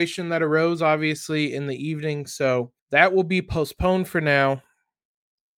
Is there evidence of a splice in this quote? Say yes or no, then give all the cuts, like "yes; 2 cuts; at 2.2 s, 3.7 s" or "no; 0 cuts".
yes; 1 cut; at 2.8 s